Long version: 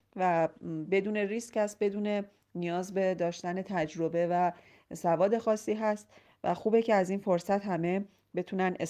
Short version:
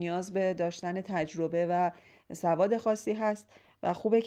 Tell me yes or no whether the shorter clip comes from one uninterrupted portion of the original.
yes